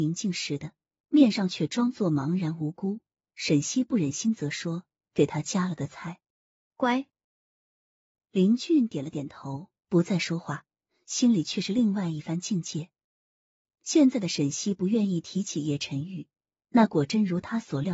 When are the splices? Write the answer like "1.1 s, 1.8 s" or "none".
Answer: 6.7 s